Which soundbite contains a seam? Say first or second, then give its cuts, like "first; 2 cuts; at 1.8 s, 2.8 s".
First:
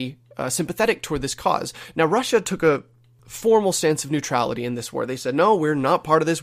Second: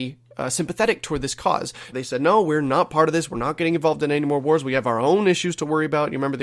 second; 1 cut; at 1.9 s